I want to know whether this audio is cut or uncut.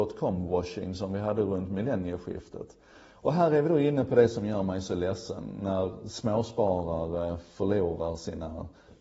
uncut